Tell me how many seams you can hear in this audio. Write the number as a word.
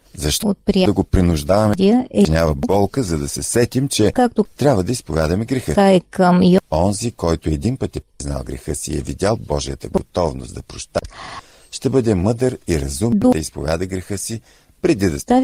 zero